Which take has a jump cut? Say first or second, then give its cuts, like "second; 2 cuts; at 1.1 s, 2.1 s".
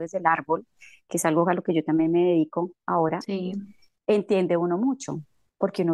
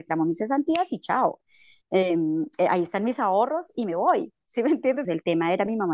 second; 1 cut; at 5.0 s